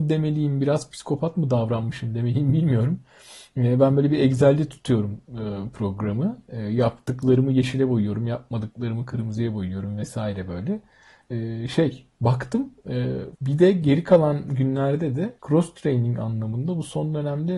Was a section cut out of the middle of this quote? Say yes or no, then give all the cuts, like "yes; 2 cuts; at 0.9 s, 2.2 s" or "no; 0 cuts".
yes; 2 cuts; at 13.4 s, 15.4 s